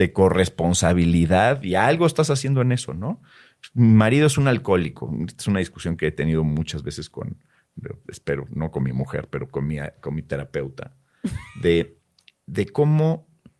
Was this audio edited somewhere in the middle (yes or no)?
no